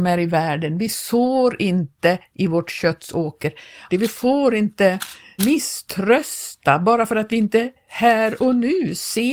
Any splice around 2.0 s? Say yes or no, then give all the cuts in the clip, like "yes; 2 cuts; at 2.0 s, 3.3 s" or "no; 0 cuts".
no; 2 cuts; at 3.9 s, 5.4 s